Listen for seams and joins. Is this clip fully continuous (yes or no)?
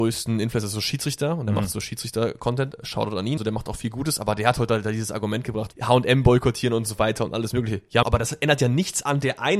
no